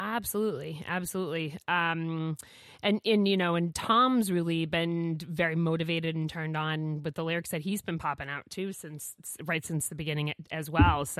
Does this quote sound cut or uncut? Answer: uncut